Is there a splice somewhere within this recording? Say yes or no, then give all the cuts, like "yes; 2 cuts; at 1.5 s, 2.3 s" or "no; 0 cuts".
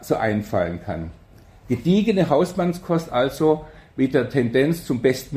no; 0 cuts